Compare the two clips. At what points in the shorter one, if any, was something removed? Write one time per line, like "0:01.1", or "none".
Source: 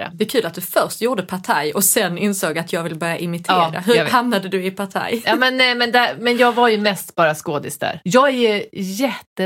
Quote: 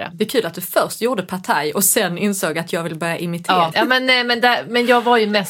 0:03.7